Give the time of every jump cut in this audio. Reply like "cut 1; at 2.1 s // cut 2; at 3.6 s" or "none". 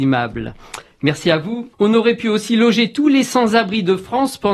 cut 1; at 1.7 s